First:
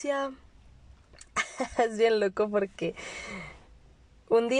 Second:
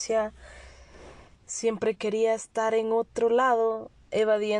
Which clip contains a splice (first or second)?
second